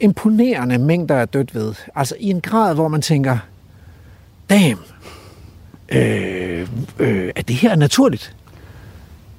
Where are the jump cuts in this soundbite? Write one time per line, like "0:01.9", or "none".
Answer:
none